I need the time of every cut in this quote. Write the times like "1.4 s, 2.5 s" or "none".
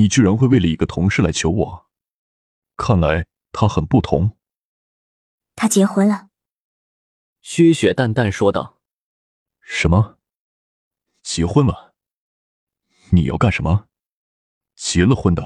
none